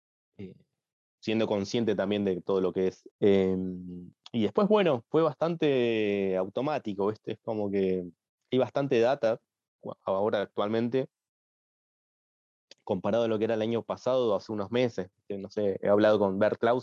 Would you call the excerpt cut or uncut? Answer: cut